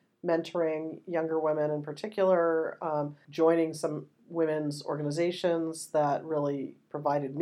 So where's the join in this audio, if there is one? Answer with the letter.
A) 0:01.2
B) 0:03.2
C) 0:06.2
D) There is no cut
B